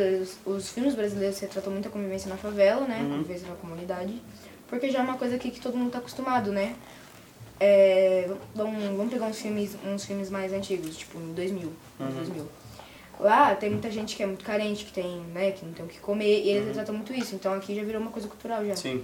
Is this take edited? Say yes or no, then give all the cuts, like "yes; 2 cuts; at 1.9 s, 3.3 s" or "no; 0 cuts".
no; 0 cuts